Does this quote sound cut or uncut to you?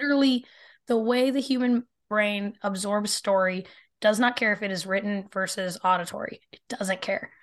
uncut